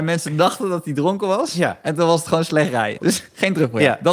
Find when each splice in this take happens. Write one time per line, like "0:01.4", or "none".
0:03.0